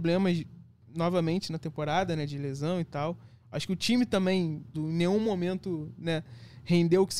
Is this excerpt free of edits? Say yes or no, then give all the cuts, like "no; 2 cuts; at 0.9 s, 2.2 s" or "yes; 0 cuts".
no; 1 cut; at 4.7 s